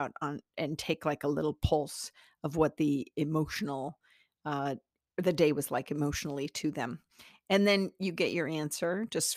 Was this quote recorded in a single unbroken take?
yes; 0 cuts

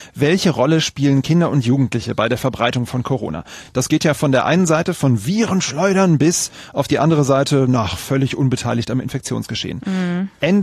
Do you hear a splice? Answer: no; 0 cuts

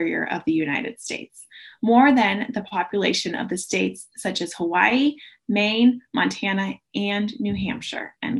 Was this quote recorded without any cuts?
yes; 0 cuts

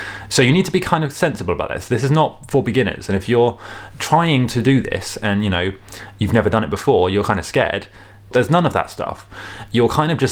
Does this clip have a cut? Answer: yes; 1 cut; at 8.3 s

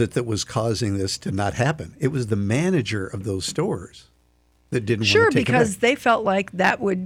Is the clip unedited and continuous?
yes; 0 cuts

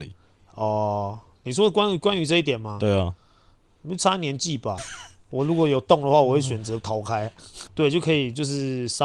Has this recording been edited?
yes; 2 cuts; at 4.8 s, 7.7 s

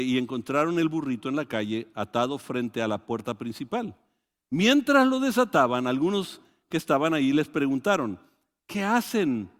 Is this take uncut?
yes; 0 cuts

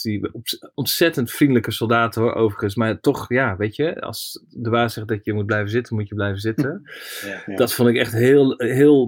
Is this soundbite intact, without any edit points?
yes; 0 cuts

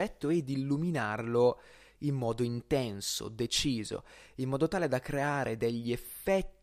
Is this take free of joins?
yes; 0 cuts

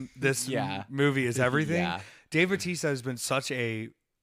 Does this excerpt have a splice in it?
no; 0 cuts

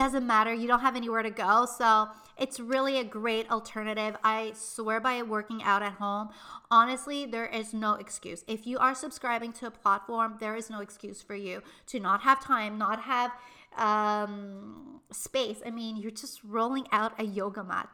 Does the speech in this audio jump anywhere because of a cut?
no; 0 cuts

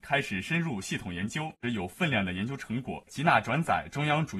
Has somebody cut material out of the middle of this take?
yes; 2 cuts; at 1.6 s, 3.1 s

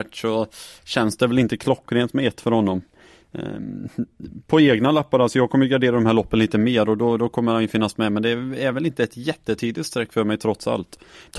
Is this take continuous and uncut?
yes; 0 cuts

